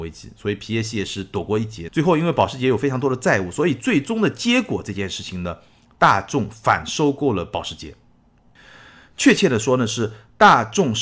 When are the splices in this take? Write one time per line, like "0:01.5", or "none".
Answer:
0:01.9